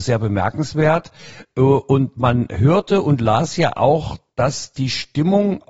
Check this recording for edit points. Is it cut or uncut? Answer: uncut